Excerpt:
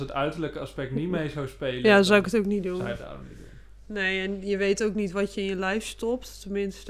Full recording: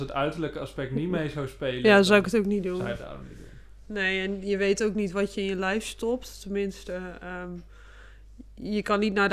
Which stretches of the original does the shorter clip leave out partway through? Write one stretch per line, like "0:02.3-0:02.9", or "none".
none